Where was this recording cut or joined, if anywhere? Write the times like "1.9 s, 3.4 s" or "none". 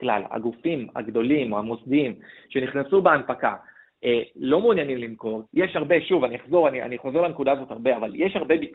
5.5 s